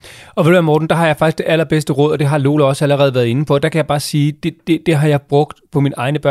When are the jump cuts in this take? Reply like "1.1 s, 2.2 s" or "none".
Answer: none